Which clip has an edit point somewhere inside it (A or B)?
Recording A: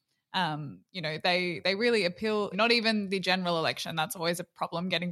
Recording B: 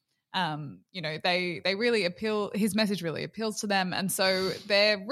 A